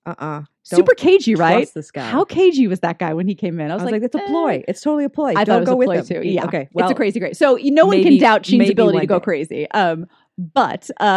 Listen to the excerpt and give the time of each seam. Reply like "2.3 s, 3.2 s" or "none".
6.2 s